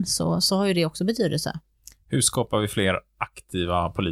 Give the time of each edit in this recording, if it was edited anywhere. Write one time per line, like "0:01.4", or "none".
none